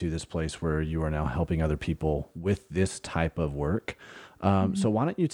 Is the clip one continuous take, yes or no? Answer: yes